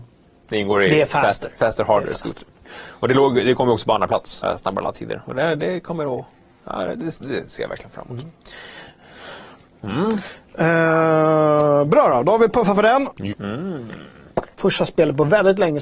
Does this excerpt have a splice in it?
yes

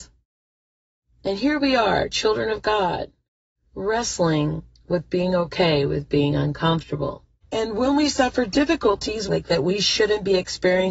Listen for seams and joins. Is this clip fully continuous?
no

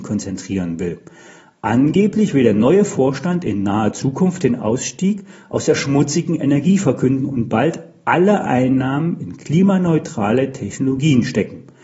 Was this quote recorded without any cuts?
yes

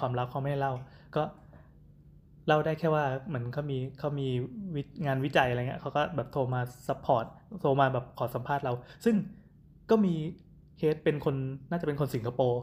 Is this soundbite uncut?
yes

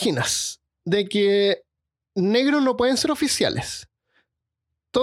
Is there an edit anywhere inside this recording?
no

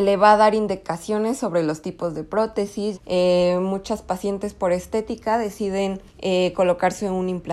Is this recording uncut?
no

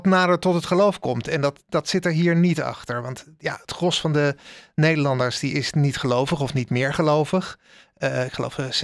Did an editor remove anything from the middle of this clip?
no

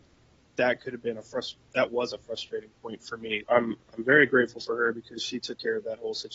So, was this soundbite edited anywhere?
yes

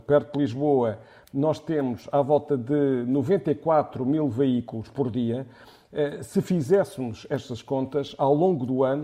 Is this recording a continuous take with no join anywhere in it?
yes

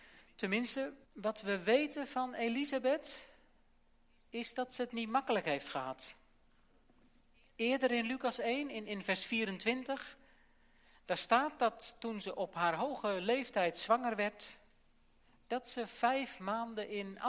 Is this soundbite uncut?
no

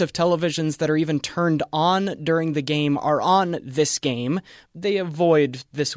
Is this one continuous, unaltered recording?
no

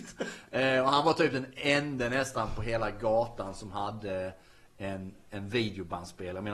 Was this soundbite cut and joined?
no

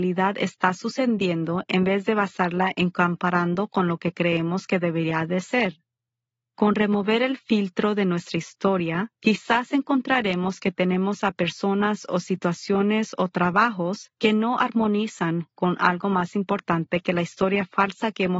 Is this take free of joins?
no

